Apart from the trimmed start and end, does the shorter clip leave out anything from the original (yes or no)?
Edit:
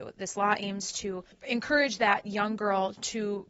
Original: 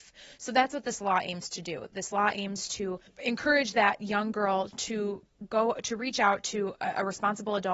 no